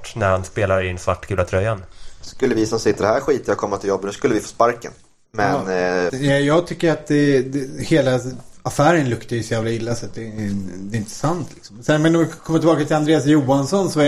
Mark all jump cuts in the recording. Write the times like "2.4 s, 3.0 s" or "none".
6.1 s